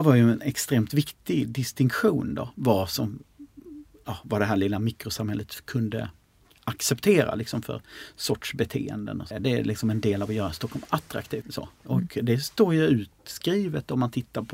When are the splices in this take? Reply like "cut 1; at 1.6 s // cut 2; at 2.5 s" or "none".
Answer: cut 1; at 9.3 s // cut 2; at 11.4 s